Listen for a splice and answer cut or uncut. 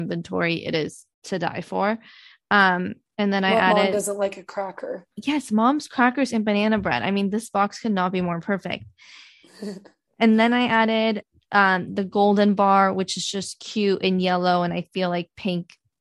cut